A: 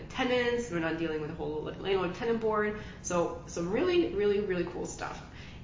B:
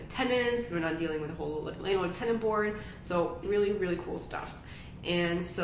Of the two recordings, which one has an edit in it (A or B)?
B